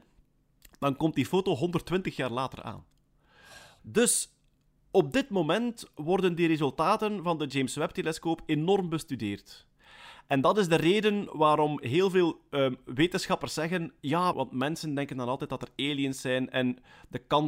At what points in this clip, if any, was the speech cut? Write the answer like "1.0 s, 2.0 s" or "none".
3.8 s, 14.3 s

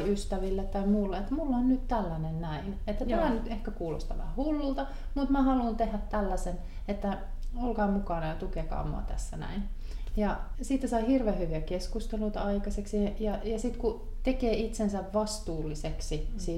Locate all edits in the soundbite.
10.5 s

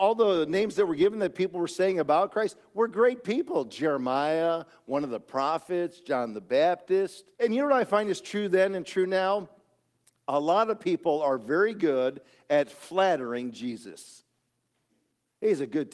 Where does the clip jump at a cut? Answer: 7.4 s

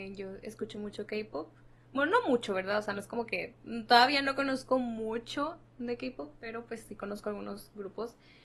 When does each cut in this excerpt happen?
none

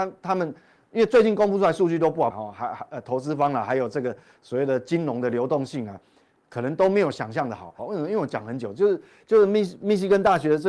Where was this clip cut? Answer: 2.3 s, 7.8 s

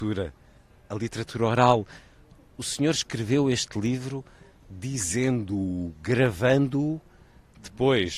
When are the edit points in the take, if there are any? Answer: none

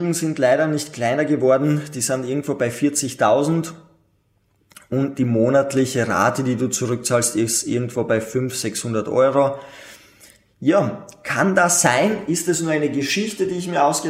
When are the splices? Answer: none

